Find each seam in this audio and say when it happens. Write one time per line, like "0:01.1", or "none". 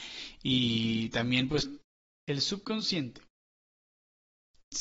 0:02.1